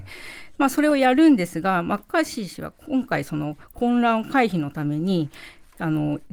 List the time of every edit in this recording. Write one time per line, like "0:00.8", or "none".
none